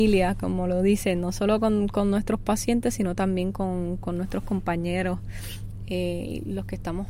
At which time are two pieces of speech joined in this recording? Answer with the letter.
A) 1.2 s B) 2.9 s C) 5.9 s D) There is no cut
D